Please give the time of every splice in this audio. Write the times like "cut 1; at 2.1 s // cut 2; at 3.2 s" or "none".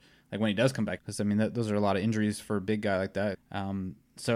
cut 1; at 1.0 s // cut 2; at 3.3 s